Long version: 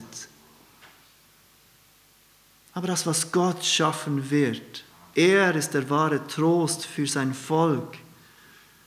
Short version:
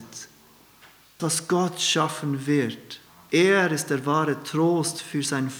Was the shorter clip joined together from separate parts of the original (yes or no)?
yes